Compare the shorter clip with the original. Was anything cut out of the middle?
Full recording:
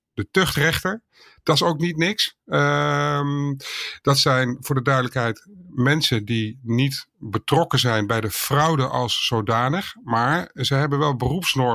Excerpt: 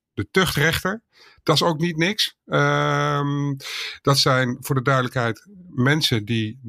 no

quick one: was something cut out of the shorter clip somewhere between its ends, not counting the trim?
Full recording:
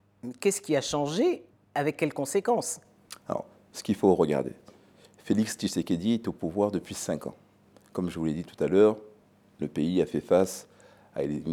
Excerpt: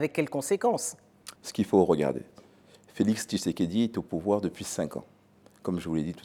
yes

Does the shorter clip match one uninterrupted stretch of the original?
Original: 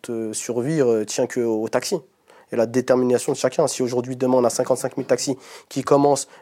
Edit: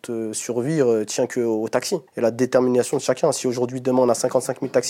no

